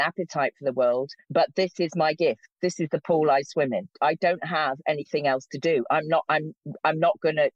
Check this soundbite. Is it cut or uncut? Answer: uncut